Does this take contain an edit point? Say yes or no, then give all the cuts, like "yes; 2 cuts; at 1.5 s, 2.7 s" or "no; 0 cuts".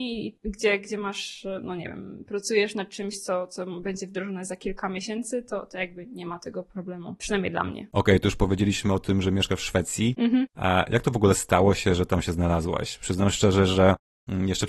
no; 0 cuts